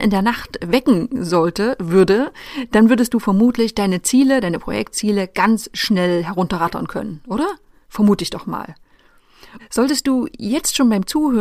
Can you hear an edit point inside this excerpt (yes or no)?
yes